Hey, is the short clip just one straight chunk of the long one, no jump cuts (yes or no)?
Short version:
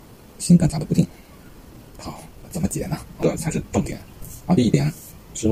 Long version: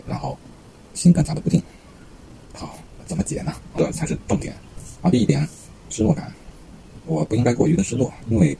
yes